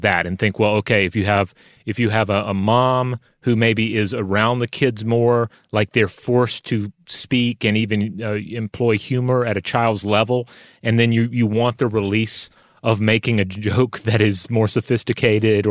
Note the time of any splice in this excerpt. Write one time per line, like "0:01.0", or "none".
none